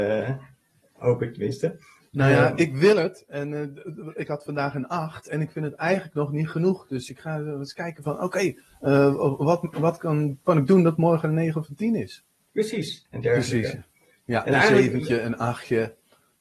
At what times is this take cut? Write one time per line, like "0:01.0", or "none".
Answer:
0:13.1